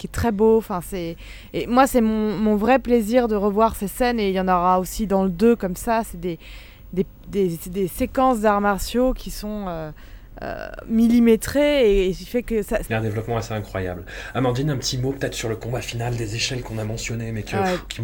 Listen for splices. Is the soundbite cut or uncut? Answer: cut